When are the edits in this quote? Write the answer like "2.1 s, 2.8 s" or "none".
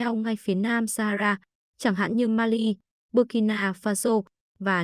none